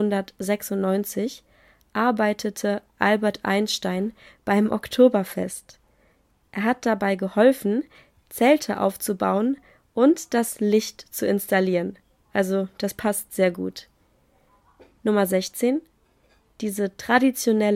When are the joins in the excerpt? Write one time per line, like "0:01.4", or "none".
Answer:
none